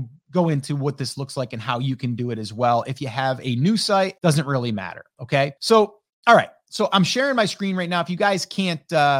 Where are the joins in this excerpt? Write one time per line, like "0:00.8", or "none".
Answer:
0:04.2
0:05.6